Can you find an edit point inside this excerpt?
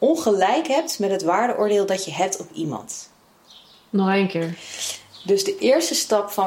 no; 0 cuts

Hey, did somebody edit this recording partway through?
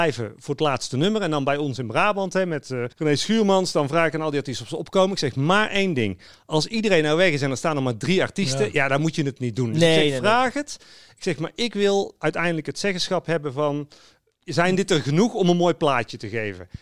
yes; 1 cut; at 2.9 s

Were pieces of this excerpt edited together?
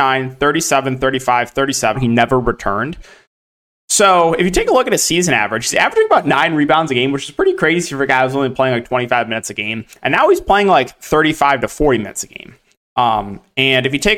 yes; 1 cut; at 1.9 s

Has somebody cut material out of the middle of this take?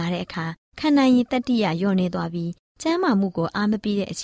no; 0 cuts

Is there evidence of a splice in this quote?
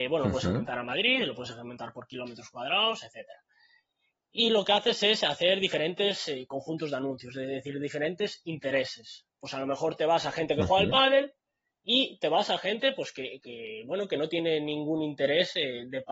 no; 0 cuts

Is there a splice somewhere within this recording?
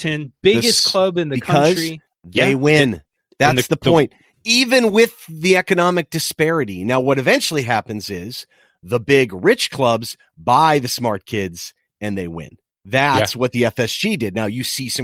yes; 1 cut; at 2.1 s

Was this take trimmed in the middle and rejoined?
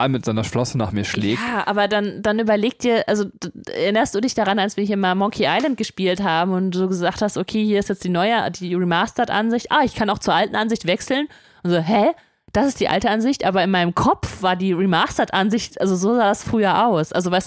no; 0 cuts

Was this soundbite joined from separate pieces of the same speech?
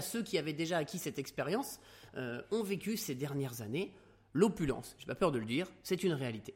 no; 0 cuts

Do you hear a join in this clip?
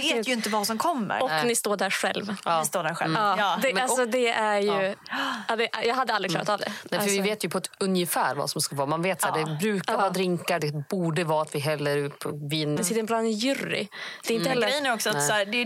yes; 2 cuts; at 10.6 s, 12.8 s

